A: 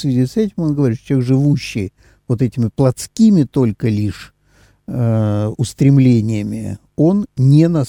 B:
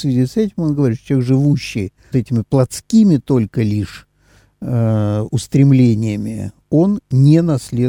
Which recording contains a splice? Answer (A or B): B